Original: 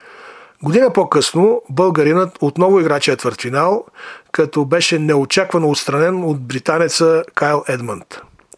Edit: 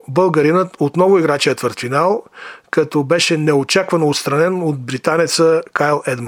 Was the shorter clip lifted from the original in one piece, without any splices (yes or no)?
yes